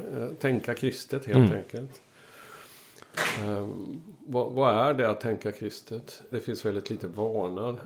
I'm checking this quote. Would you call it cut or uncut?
cut